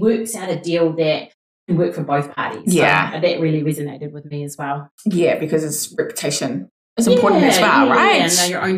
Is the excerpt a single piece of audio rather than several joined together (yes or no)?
yes